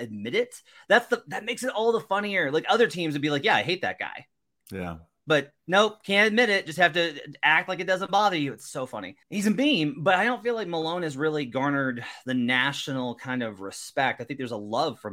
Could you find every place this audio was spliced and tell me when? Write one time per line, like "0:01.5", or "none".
0:05.6
0:09.2